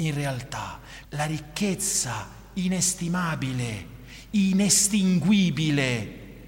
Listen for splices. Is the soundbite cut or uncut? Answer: cut